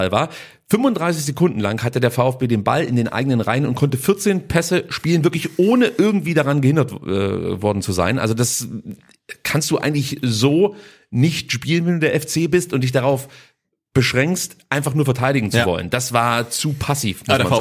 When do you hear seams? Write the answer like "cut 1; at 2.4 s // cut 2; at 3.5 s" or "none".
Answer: none